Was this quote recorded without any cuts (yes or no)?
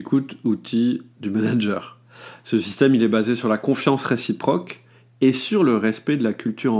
yes